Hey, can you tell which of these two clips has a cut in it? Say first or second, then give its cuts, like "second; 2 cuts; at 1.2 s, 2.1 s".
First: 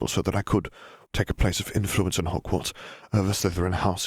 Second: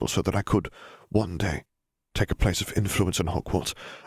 first; 1 cut; at 1.1 s